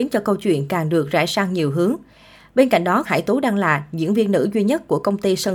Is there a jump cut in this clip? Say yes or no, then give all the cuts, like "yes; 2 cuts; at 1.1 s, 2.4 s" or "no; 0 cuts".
yes; 1 cut; at 3.0 s